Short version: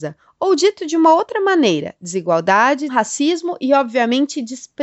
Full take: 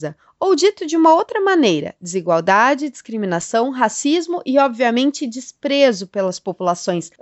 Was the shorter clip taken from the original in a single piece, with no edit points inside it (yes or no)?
no